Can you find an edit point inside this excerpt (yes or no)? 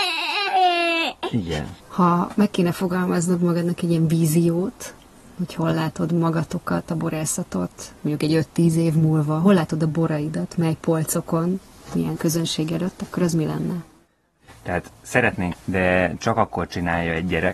yes